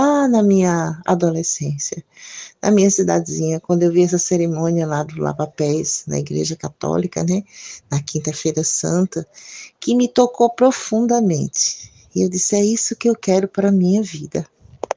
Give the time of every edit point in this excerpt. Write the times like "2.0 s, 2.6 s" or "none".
none